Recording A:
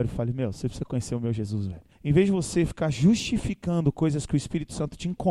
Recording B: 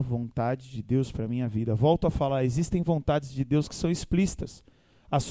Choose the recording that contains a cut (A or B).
A